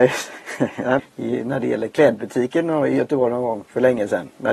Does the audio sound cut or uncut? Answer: cut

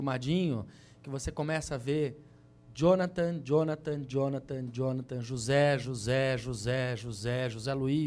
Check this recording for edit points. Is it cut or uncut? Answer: uncut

